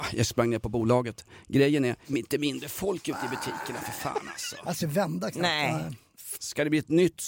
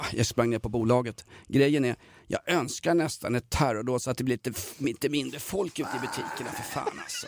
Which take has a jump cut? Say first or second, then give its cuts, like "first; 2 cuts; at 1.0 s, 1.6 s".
first; 3 cuts; at 2.0 s, 4.8 s, 6.3 s